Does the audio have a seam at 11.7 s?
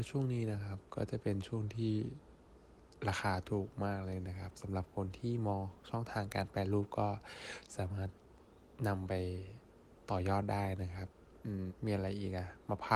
yes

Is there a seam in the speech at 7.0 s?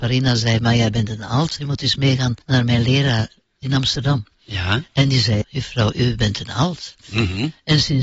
no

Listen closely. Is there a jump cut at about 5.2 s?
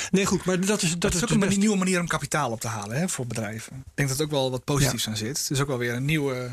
no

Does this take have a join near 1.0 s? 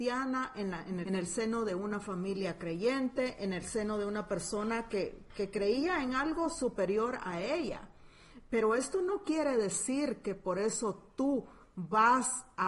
yes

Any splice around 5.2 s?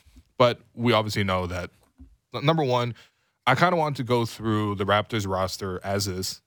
no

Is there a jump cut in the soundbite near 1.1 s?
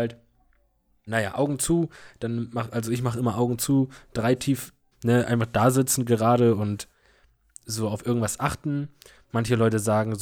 yes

